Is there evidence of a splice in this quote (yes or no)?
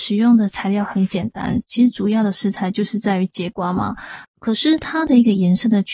yes